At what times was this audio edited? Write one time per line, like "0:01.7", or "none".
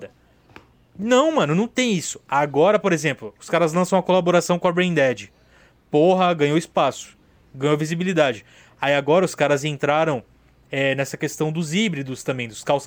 none